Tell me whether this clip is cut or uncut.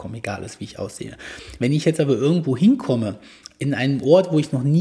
uncut